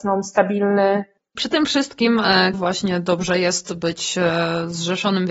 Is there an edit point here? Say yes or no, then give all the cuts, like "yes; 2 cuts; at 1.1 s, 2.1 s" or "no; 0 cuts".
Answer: yes; 2 cuts; at 1.2 s, 2.5 s